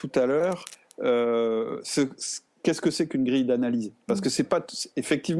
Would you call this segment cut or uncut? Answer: uncut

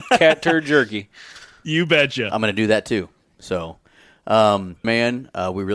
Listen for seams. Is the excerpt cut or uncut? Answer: cut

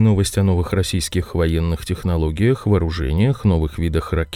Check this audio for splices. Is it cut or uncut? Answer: uncut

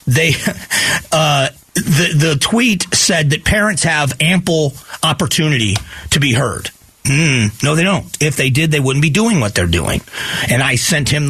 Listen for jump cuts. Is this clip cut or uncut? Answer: uncut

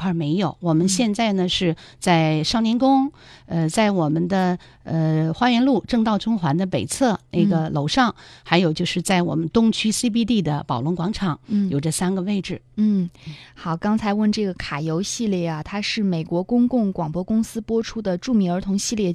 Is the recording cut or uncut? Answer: uncut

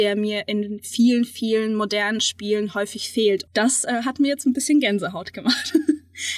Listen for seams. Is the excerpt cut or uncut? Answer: cut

